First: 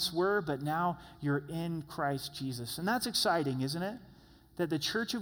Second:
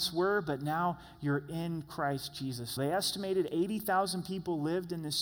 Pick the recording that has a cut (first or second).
second